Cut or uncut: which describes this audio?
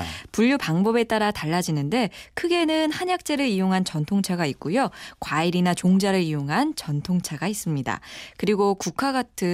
uncut